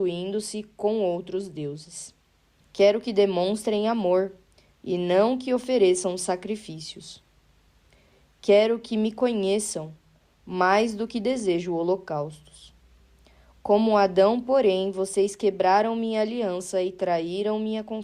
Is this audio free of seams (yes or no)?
no